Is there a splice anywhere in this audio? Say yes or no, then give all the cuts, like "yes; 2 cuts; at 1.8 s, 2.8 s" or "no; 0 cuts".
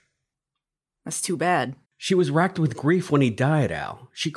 yes; 1 cut; at 1.8 s